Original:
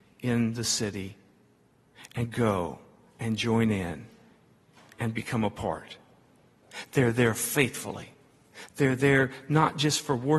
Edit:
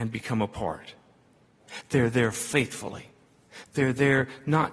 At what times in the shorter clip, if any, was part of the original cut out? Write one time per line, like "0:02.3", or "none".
none

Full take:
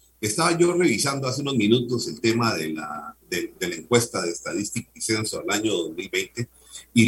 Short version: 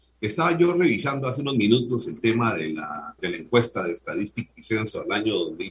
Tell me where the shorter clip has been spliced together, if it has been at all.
0:03.2

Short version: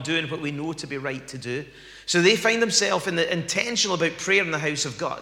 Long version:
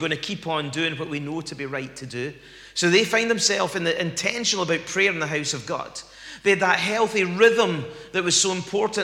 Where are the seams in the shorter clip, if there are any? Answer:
none

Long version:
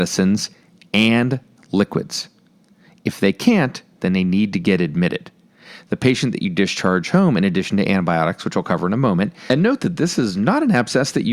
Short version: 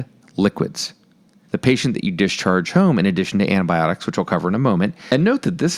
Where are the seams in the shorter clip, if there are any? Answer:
0:01.4

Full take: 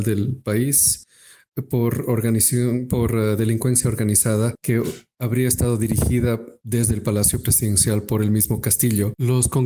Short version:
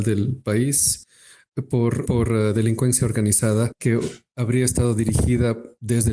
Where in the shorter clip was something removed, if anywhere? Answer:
0:02.0

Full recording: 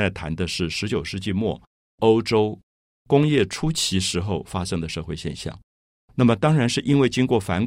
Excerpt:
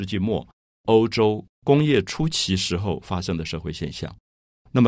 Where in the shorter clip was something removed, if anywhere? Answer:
0:01.5

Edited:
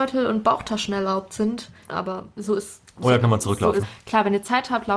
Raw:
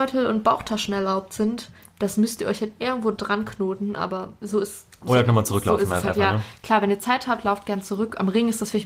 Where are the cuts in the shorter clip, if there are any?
0:01.9
0:03.8

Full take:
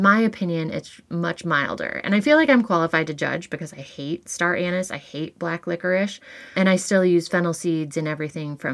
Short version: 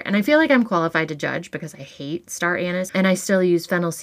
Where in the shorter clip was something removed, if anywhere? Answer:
0:02.9

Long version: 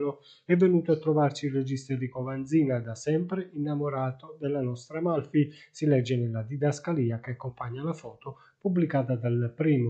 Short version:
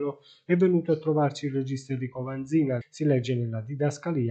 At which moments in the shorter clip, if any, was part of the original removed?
0:02.8

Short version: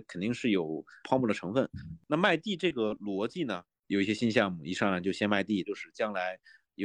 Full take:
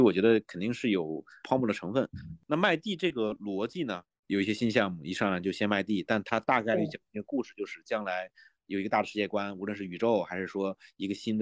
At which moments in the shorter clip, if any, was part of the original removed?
0:05.6

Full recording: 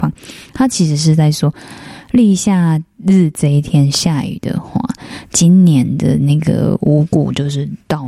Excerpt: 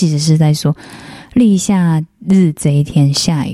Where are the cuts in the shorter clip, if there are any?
none

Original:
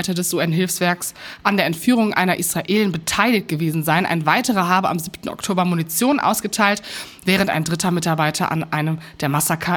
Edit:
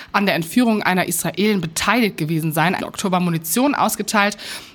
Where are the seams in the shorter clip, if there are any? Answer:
0:02.8

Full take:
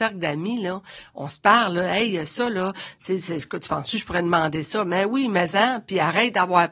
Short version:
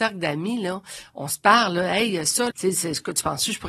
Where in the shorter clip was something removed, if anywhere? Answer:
0:02.5

